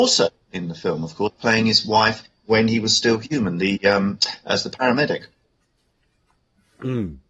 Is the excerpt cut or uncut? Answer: uncut